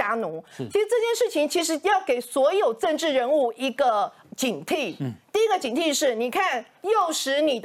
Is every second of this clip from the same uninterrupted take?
yes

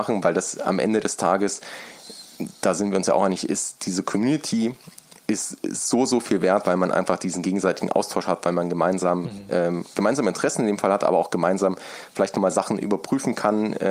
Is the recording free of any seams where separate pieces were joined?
yes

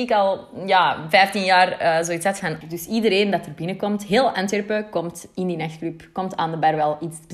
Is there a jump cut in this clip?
yes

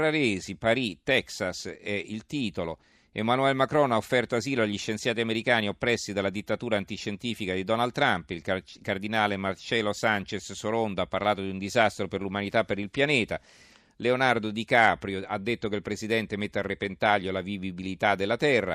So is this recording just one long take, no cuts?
yes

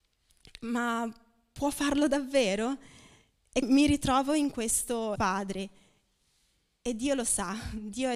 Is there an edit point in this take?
yes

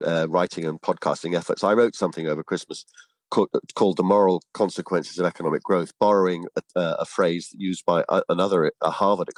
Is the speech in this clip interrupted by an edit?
no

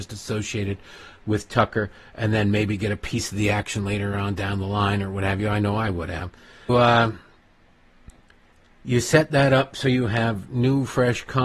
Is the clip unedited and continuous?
no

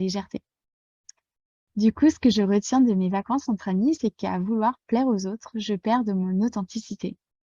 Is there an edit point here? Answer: no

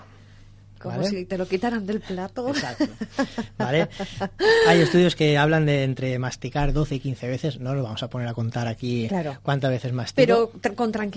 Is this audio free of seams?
yes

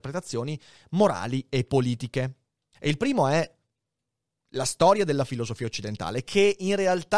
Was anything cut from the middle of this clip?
yes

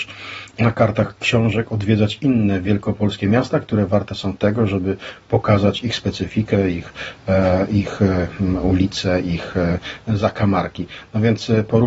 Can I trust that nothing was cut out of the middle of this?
yes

